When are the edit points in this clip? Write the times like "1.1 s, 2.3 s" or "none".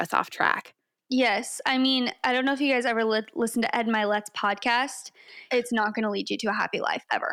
5.5 s